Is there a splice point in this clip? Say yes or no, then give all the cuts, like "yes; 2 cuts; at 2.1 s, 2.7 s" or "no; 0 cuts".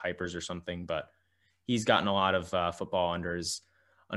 no; 0 cuts